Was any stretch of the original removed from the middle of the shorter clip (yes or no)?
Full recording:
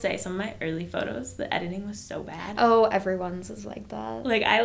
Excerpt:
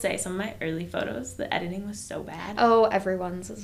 no